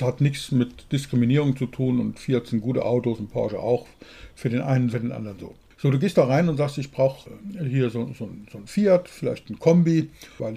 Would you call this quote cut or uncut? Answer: cut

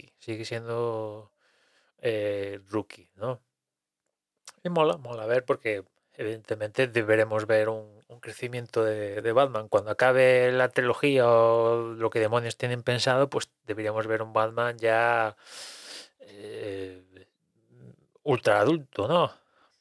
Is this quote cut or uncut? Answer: uncut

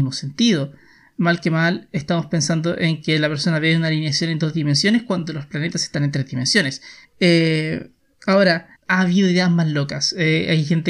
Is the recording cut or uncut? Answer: cut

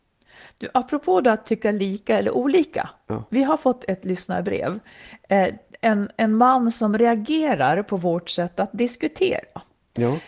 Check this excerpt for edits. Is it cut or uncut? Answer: uncut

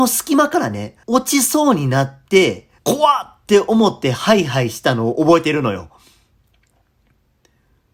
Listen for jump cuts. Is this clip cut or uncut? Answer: cut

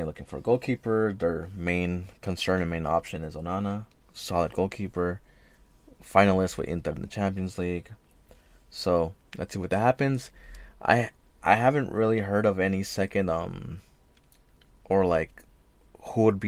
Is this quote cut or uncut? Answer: uncut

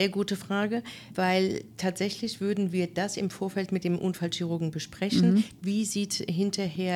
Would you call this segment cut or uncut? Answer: cut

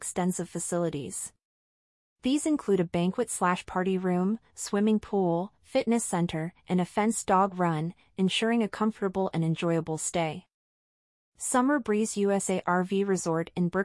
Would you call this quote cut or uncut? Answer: uncut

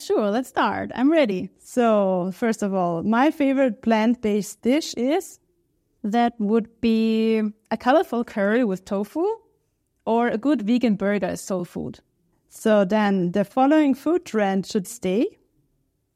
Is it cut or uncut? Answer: cut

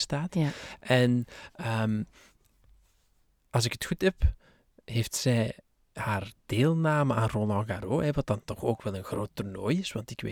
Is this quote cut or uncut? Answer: uncut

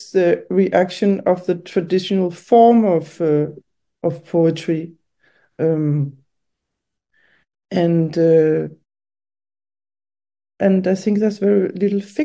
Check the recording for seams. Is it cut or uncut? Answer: uncut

